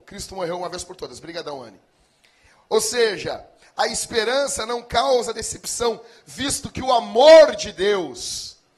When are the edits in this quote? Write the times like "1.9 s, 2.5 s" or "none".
none